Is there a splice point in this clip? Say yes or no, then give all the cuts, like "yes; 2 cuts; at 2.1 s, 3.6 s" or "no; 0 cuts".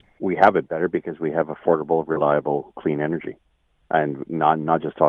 no; 0 cuts